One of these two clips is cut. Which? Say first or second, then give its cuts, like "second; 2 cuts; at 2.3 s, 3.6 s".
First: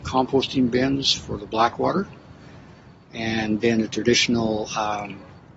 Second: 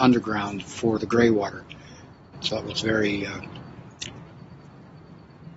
second; 1 cut; at 2.3 s